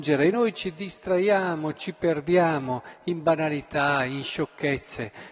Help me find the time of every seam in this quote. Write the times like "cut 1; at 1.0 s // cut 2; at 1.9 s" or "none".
none

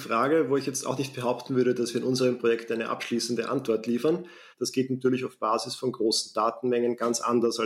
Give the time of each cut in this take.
cut 1; at 4.5 s

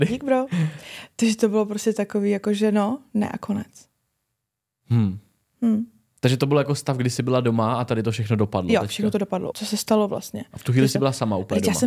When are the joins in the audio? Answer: cut 1; at 9.5 s

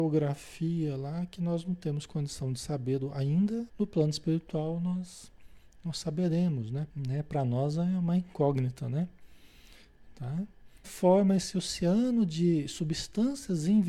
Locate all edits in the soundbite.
cut 1; at 3.7 s // cut 2; at 6.9 s // cut 3; at 10.8 s

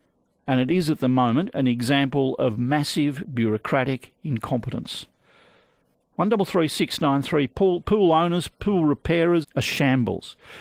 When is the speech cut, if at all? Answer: cut 1; at 9.4 s

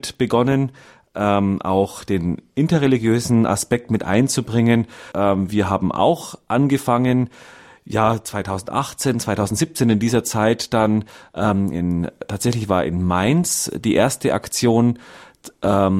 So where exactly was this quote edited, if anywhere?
cut 1; at 5.1 s

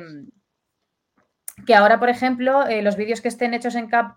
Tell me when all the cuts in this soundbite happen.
none

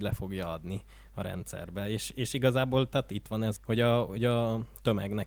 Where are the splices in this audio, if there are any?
cut 1; at 3.6 s

